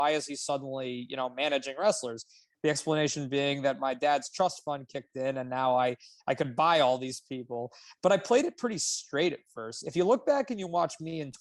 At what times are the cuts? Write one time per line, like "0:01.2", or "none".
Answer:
none